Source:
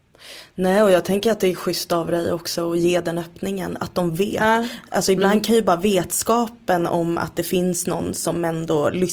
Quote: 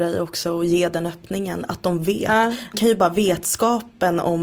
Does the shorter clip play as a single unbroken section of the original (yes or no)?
no